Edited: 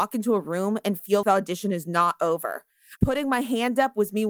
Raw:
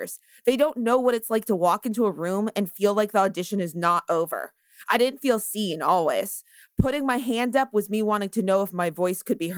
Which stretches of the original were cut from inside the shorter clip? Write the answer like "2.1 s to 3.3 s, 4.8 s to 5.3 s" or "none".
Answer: 2.9 s to 3.1 s, 4.8 s to 6.7 s